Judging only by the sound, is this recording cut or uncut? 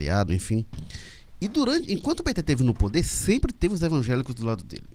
uncut